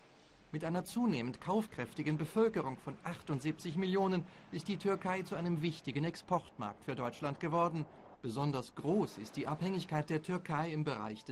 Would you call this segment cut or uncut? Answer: cut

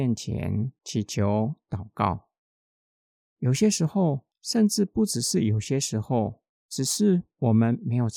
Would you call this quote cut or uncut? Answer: cut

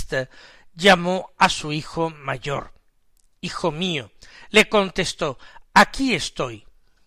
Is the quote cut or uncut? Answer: uncut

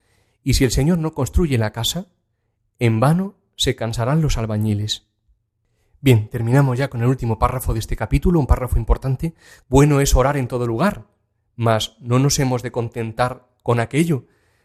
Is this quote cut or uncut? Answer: cut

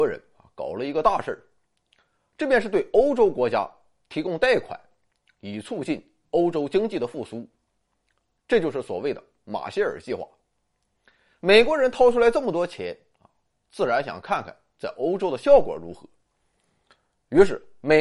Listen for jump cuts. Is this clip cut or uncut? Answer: uncut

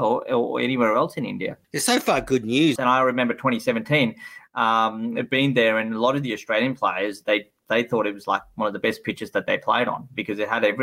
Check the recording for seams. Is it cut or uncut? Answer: cut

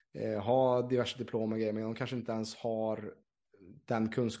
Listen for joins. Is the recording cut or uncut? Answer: uncut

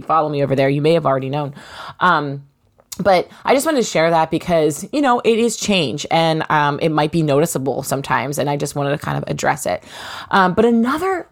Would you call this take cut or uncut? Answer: uncut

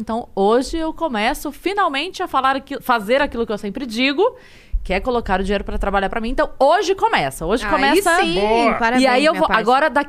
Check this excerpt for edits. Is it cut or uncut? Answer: uncut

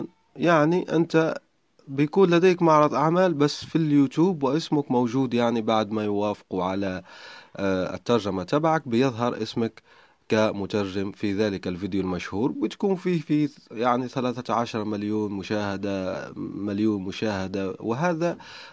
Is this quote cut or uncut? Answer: uncut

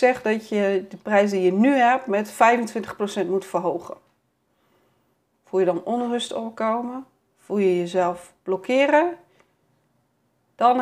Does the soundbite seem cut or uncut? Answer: uncut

